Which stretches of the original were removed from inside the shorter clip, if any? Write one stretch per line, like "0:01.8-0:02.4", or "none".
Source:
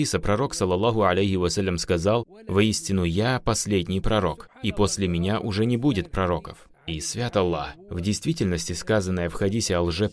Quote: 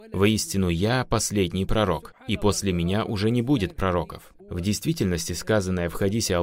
0:06.7-0:07.8